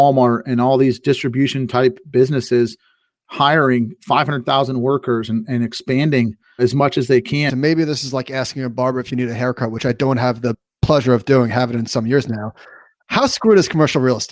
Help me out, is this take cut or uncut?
cut